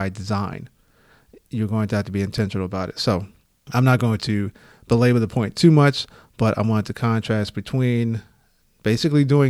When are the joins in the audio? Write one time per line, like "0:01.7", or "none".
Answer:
none